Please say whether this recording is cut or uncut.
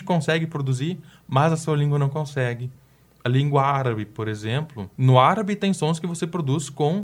uncut